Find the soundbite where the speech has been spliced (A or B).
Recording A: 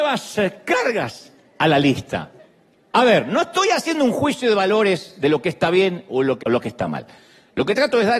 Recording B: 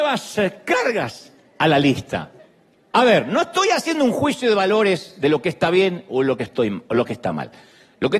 A